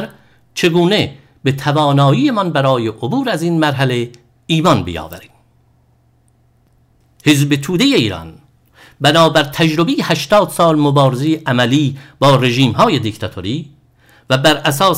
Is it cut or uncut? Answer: uncut